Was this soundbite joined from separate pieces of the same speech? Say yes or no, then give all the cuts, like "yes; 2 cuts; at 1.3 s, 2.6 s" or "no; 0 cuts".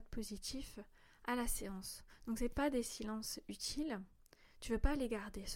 no; 0 cuts